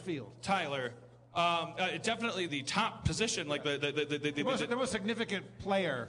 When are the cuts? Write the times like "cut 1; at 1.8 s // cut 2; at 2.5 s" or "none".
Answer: cut 1; at 1.3 s // cut 2; at 2.5 s